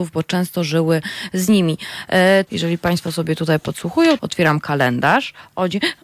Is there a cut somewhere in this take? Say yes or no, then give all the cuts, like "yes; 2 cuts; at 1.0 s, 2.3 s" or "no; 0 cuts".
yes; 2 cuts; at 2.5 s, 4.2 s